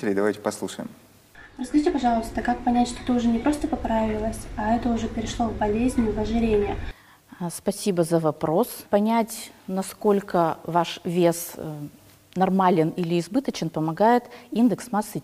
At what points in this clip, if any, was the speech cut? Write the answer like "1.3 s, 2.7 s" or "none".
8.8 s